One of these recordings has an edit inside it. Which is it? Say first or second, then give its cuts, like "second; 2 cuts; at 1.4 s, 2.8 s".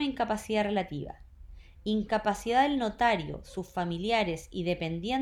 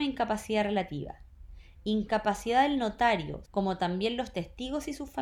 second; 1 cut; at 3.4 s